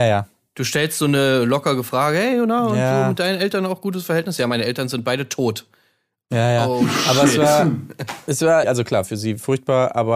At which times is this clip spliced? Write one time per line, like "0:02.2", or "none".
0:08.6